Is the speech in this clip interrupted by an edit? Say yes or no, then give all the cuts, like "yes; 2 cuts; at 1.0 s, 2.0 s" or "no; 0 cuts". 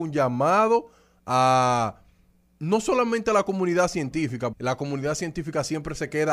yes; 1 cut; at 4.5 s